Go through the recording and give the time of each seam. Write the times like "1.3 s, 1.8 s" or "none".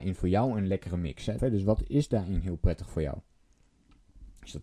1.4 s